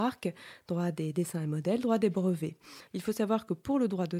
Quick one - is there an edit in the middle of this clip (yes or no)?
yes